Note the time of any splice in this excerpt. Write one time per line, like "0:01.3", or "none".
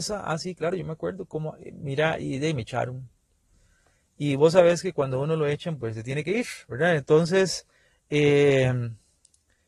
none